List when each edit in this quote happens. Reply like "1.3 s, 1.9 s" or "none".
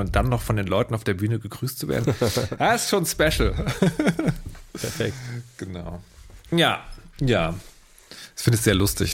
none